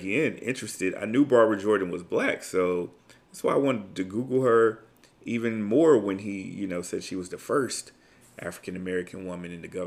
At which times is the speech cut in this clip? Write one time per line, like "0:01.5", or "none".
none